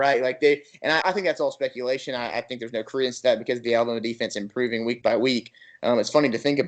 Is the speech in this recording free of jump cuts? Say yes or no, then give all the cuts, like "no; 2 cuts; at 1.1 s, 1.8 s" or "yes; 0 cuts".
no; 1 cut; at 1.0 s